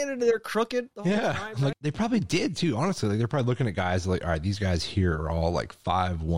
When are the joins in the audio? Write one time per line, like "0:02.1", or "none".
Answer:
0:01.7